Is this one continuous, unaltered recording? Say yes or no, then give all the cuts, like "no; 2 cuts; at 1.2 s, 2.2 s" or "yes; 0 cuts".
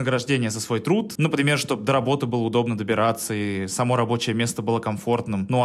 no; 1 cut; at 1.1 s